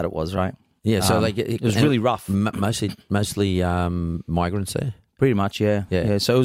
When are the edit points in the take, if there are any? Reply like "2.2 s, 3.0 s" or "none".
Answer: none